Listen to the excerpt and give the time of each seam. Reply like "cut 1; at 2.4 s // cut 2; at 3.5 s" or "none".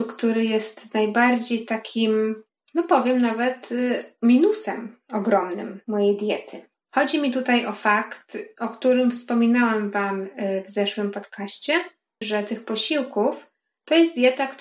cut 1; at 12.2 s